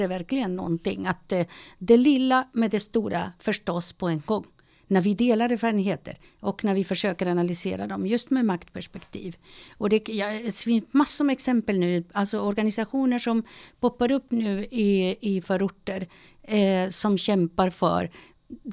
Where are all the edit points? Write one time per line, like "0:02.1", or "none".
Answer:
none